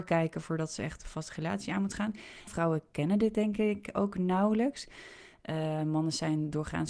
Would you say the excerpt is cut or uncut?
cut